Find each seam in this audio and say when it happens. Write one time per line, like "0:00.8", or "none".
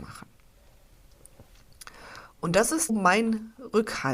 0:02.9

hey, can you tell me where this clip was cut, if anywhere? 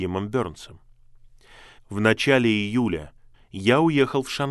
0:01.8
0:03.3

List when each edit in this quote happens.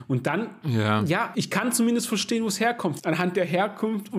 0:01.3
0:03.0

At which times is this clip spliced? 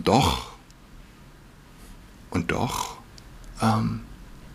none

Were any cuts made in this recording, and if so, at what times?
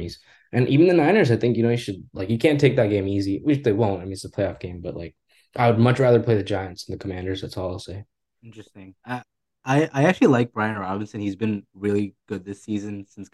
none

